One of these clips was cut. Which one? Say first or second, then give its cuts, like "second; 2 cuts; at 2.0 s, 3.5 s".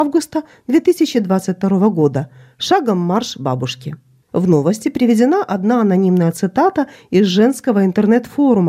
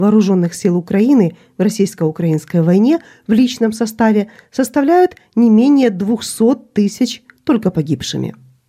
first; 1 cut; at 4.3 s